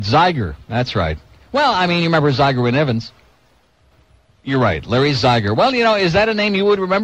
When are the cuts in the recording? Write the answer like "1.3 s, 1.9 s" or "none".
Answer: none